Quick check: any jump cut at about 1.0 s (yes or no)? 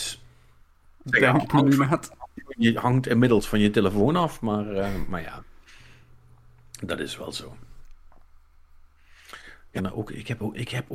yes